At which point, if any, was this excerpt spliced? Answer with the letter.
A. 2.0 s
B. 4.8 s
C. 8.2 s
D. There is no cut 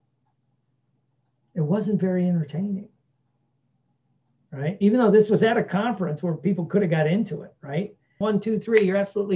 C